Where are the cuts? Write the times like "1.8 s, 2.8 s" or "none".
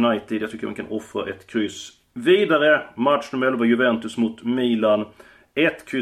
none